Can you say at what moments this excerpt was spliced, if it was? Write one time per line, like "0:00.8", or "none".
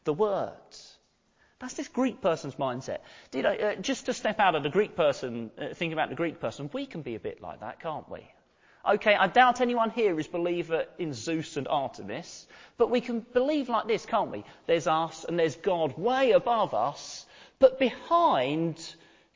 none